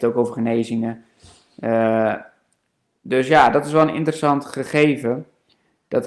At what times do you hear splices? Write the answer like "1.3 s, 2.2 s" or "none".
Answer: none